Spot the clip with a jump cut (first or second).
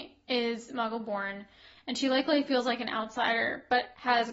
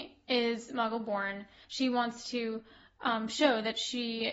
second